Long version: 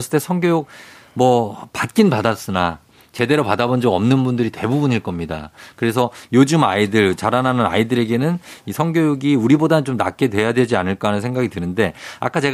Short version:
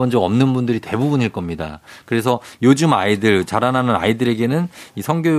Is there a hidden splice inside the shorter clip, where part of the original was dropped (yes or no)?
no